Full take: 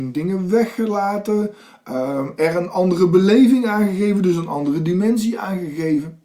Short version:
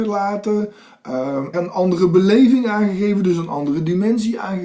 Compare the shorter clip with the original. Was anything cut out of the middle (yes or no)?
yes